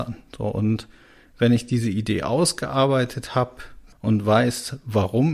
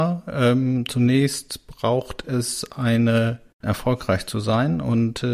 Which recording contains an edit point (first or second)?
second